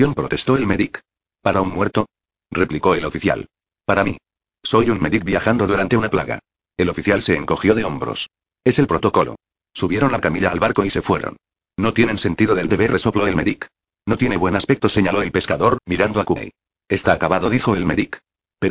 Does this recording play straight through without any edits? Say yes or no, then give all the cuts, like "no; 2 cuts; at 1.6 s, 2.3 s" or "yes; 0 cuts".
yes; 0 cuts